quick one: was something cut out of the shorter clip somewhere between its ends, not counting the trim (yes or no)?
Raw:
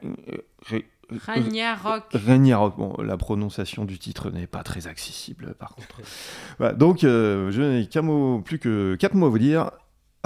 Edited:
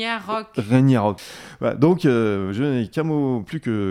yes